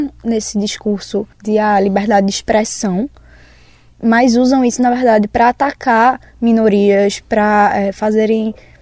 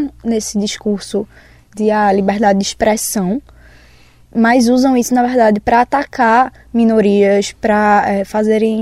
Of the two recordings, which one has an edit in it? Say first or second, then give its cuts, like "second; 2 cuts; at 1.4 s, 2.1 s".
first; 1 cut; at 1.3 s